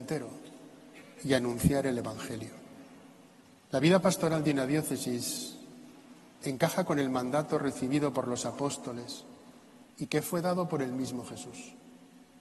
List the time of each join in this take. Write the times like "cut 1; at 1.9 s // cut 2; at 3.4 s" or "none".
cut 1; at 3.7 s // cut 2; at 9.9 s